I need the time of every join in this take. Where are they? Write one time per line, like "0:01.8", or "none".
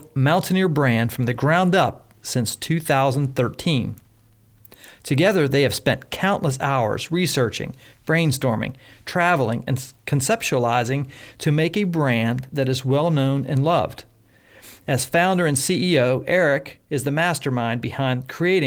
none